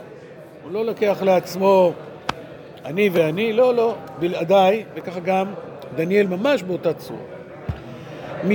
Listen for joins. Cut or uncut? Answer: uncut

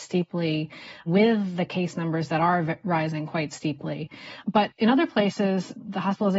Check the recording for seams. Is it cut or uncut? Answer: uncut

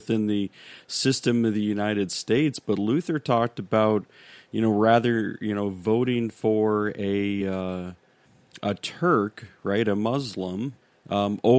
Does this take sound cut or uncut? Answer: uncut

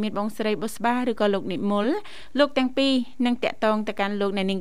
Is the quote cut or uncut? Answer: uncut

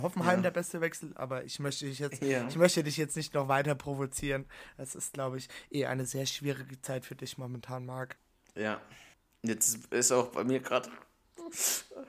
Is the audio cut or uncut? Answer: uncut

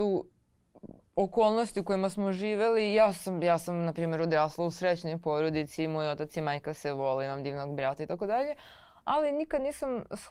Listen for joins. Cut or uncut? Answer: uncut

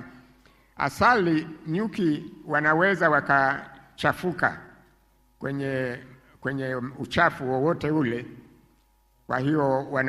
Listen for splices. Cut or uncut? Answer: uncut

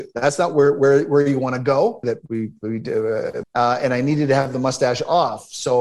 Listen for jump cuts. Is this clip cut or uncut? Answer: cut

